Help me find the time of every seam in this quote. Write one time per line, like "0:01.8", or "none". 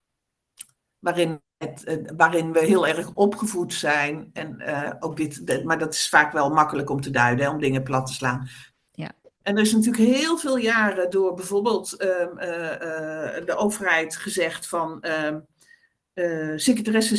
0:08.7